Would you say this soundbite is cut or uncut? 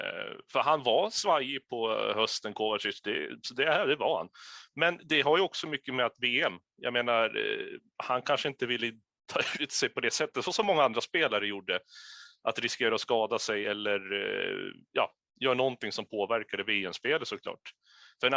uncut